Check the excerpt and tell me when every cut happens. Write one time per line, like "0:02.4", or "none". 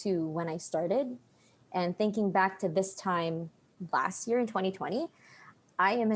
none